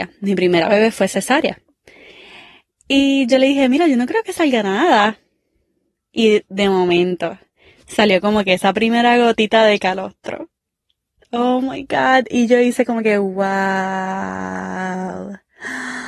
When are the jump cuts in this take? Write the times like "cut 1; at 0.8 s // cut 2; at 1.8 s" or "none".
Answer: cut 1; at 2.7 s